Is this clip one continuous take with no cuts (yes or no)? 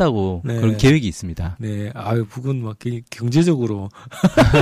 yes